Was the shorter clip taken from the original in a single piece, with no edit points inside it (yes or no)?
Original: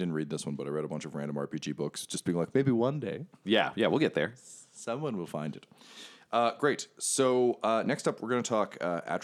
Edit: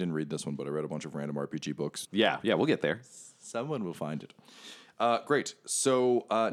no